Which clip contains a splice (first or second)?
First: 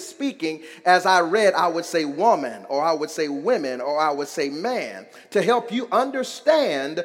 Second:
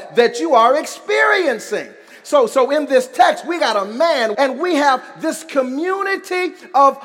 second